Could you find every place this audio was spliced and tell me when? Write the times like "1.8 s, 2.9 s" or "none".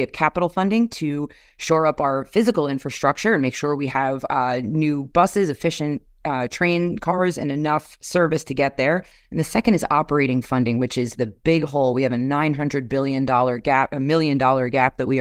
none